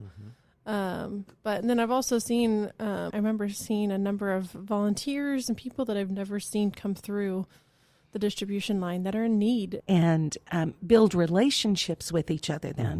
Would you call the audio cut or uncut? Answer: cut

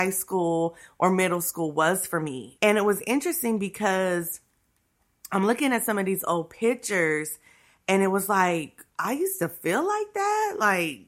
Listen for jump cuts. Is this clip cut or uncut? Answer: cut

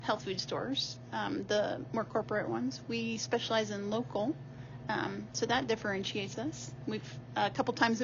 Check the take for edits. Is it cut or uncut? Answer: uncut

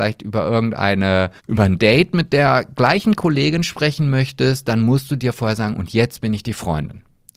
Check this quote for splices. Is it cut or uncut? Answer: cut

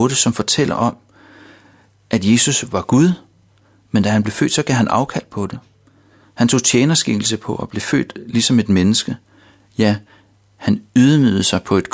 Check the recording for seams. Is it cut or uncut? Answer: uncut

